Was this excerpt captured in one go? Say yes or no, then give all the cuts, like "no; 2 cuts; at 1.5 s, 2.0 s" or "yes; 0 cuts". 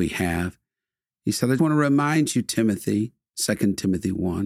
no; 1 cut; at 1.6 s